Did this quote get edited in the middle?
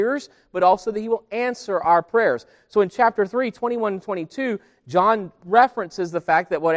no; 0 cuts

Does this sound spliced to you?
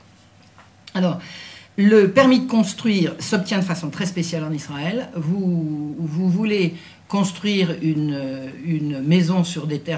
no; 0 cuts

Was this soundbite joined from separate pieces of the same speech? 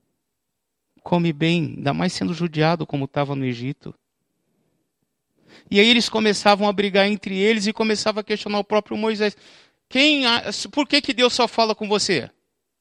no; 0 cuts

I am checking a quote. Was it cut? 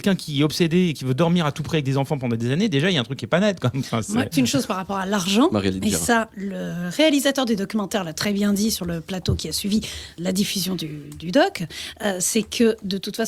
yes; 1 cut; at 4.3 s

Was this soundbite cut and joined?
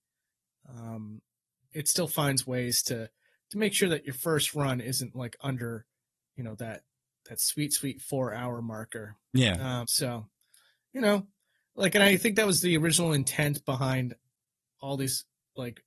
yes; 1 cut; at 9.8 s

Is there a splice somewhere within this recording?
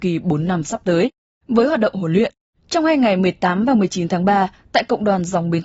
yes; 1 cut; at 1.3 s

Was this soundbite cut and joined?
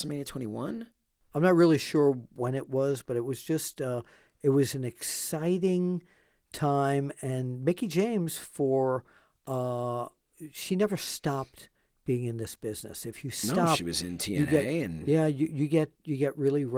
no; 0 cuts

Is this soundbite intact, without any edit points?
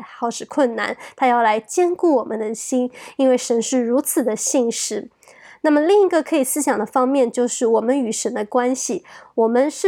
yes; 0 cuts

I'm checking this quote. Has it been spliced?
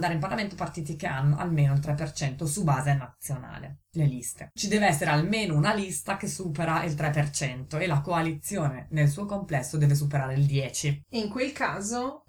yes; 1 cut; at 4.6 s

